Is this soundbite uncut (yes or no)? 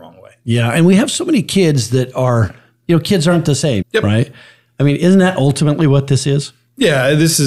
no